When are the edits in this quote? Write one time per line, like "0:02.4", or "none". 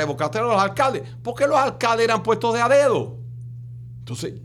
none